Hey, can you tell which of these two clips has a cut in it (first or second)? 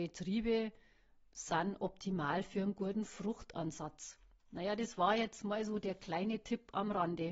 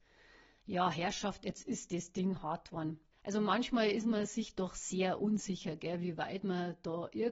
second